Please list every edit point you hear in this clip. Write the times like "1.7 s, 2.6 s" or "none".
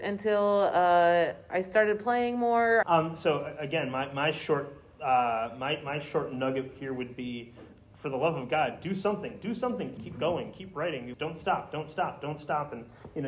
2.8 s, 10.0 s, 11.1 s